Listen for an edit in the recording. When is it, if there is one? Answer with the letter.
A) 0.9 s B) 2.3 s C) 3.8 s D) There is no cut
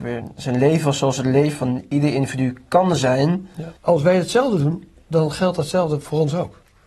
C